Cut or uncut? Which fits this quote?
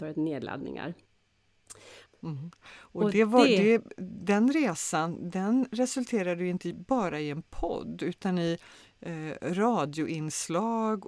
cut